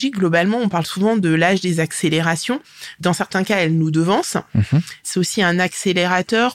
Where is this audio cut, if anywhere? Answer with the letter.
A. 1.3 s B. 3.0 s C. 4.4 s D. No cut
D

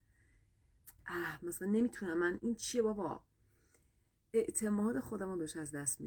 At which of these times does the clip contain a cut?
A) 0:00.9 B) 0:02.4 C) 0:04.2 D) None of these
B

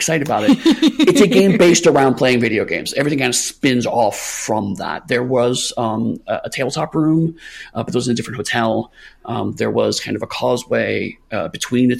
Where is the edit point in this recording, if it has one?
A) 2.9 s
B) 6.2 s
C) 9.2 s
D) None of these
D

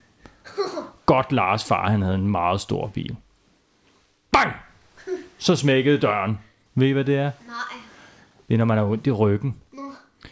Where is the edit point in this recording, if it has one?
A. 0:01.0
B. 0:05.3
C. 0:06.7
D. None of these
C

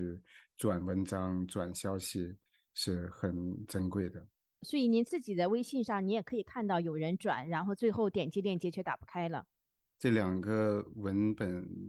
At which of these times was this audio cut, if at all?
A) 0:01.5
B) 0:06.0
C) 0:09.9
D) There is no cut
C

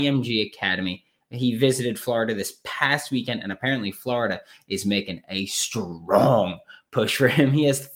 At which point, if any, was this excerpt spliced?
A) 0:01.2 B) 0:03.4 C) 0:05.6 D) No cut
A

